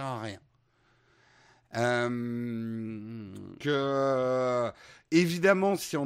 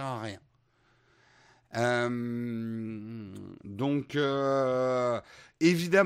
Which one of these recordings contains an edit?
first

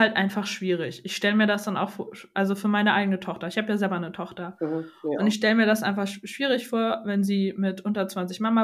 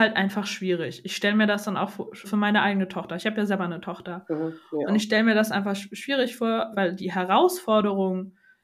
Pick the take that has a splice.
second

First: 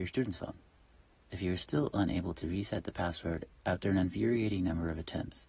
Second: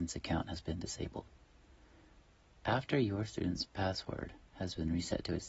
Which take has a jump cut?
first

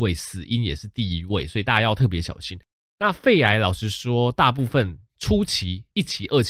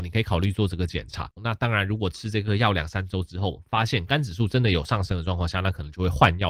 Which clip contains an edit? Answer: second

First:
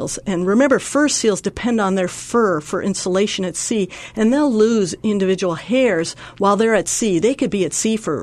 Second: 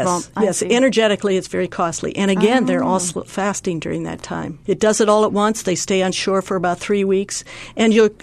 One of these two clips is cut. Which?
second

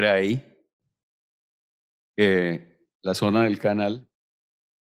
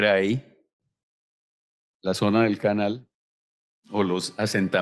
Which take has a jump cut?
second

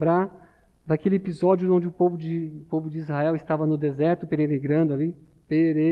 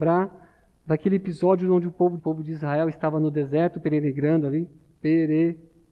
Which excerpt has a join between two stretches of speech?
second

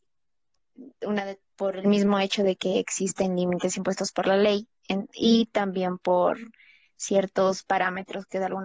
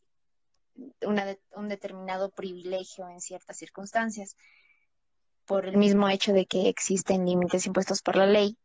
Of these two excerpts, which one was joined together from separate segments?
first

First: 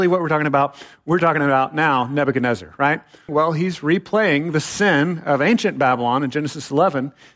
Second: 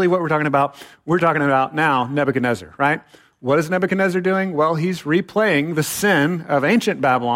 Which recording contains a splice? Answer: first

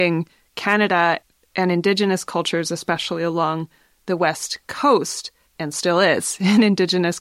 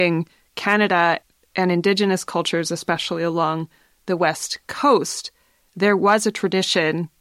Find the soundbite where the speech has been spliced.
first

